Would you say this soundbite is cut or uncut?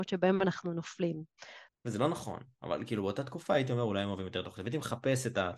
cut